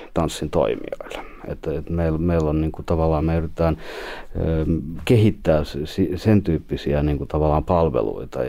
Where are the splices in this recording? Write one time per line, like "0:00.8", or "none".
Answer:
none